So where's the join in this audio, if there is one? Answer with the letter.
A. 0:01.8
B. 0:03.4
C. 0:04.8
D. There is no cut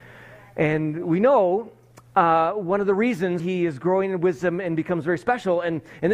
B